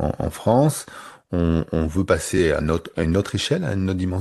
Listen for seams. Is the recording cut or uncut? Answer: cut